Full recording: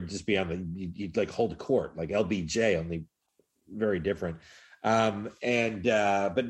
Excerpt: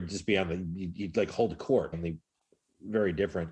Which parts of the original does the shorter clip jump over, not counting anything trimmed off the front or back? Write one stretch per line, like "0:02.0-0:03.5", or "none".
0:01.9-0:02.8